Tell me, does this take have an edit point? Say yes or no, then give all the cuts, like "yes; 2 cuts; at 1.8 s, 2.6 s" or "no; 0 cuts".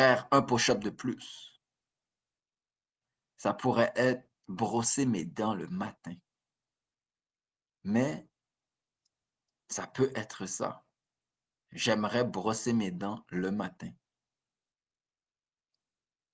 yes; 1 cut; at 7.8 s